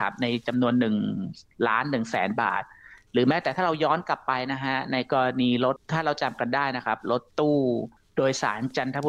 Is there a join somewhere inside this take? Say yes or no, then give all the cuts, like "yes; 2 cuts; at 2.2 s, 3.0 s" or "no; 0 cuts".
yes; 1 cut; at 5.8 s